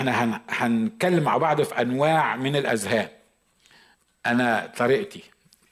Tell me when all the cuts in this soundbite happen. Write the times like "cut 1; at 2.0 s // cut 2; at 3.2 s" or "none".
none